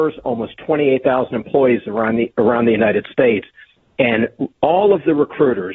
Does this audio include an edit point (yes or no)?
no